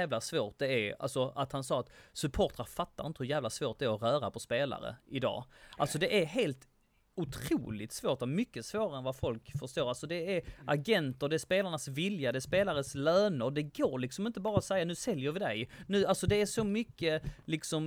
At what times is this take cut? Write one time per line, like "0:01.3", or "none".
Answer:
none